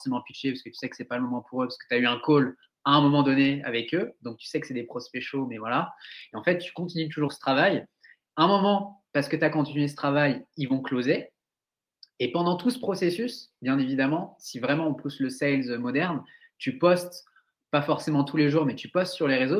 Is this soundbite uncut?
yes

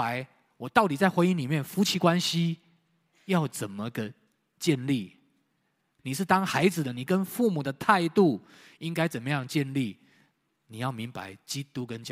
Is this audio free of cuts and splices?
no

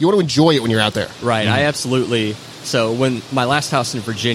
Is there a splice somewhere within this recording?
no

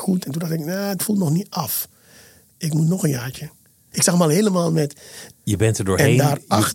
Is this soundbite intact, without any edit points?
no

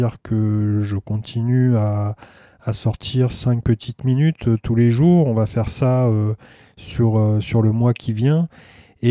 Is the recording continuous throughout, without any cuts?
yes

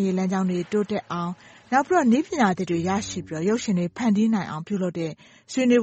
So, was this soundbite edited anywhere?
no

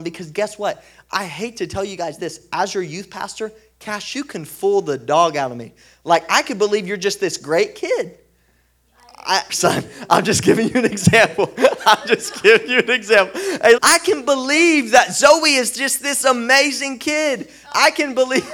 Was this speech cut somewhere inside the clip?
yes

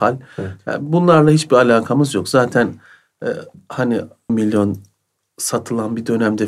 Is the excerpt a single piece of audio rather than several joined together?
no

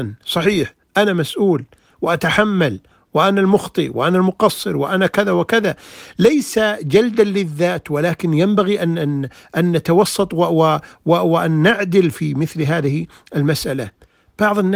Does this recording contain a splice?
no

